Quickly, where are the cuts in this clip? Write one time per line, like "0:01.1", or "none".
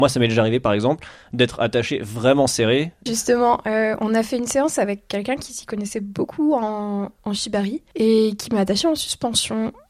0:03.1